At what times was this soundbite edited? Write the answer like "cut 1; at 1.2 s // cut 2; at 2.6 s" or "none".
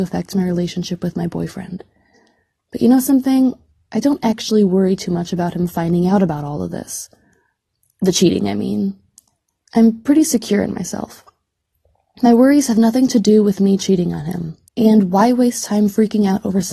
cut 1; at 14.7 s